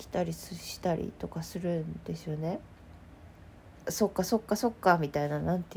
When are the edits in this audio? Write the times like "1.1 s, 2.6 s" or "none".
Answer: 3.9 s

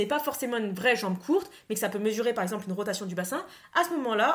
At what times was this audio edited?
none

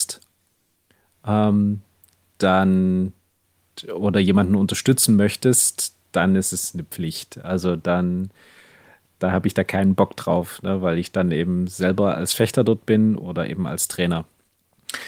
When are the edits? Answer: none

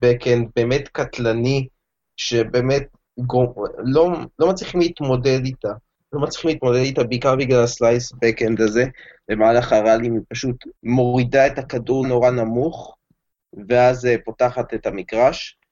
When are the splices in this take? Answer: 10.8 s, 12.0 s

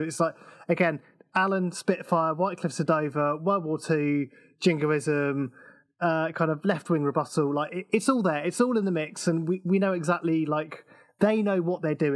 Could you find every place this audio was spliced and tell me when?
none

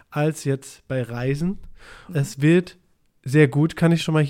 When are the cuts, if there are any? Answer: 2.1 s

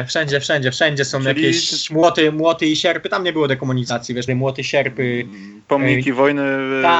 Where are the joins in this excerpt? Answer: 4.3 s

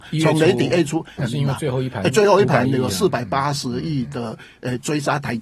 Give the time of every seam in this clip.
1.2 s

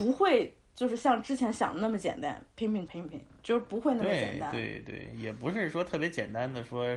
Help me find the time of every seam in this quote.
2.9 s

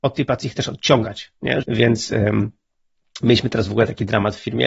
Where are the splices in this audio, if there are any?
1.6 s

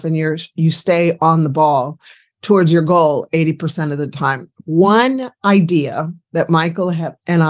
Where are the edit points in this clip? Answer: none

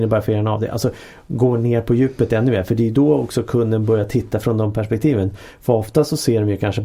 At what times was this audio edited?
none

